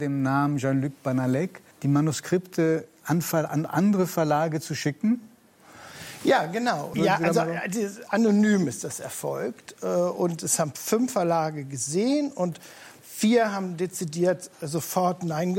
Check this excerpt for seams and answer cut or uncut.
cut